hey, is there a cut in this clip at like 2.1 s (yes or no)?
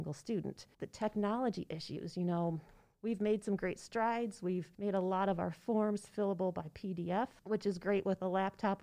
no